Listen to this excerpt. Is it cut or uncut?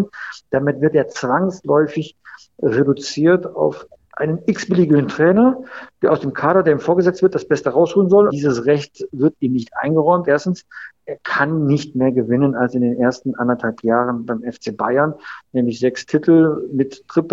cut